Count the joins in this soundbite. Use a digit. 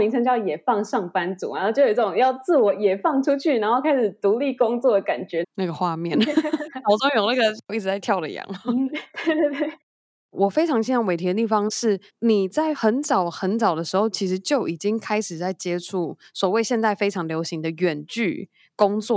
1